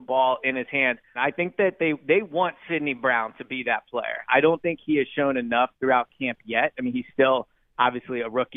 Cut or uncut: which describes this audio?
cut